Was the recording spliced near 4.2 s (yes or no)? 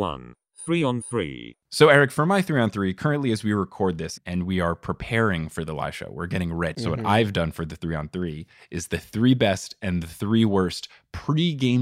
yes